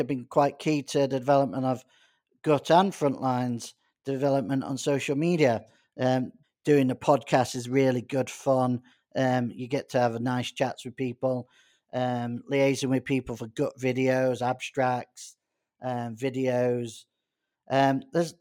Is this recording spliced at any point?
yes; 1 cut; at 6.4 s

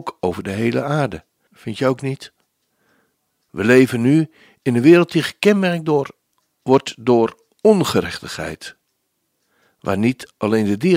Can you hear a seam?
yes; 1 cut; at 1.5 s

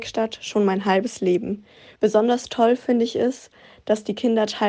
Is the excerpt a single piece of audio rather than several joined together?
no; 1 cut; at 2.0 s

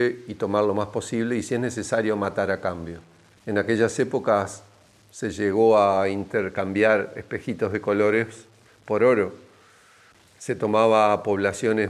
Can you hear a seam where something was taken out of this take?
yes; 1 cut; at 3.4 s

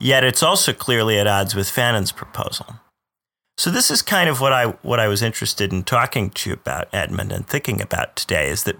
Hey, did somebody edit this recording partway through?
no; 0 cuts

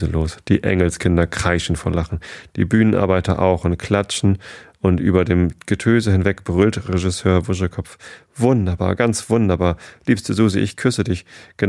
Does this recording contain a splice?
no; 0 cuts

